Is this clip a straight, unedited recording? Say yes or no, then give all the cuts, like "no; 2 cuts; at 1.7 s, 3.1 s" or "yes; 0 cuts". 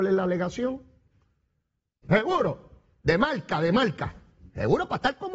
no; 1 cut; at 2.0 s